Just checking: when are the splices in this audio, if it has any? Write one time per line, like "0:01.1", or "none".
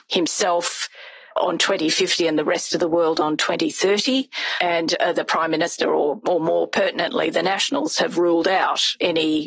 0:04.6